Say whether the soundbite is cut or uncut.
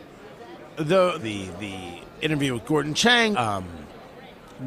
cut